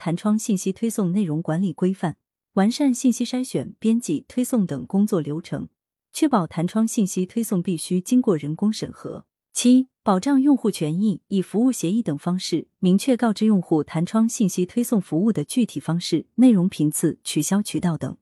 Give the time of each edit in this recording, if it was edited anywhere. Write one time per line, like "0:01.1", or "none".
none